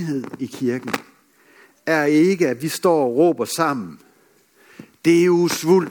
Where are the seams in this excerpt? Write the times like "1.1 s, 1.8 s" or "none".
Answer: none